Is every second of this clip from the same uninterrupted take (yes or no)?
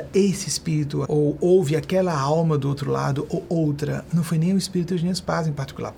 no